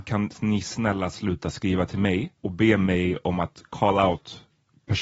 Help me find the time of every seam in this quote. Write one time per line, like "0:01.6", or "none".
0:02.4